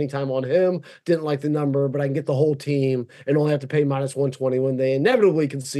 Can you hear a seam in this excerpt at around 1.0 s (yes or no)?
no